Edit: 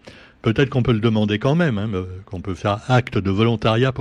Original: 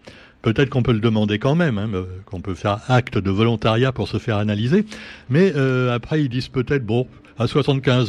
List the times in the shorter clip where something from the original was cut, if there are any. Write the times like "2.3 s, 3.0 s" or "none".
none